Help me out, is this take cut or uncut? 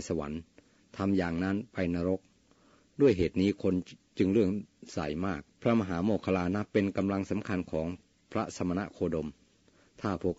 cut